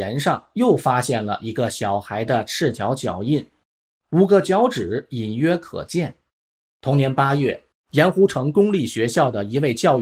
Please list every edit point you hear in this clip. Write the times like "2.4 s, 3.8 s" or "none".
7.8 s